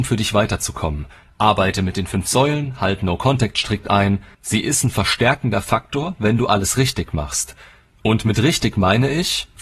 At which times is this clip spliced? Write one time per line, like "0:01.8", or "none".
0:04.3